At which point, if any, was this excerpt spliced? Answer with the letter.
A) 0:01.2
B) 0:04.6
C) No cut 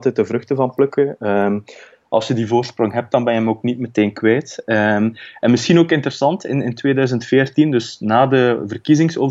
C